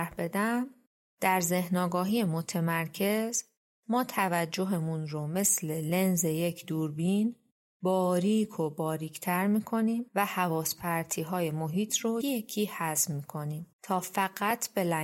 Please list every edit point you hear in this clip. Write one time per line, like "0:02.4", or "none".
0:12.2
0:13.7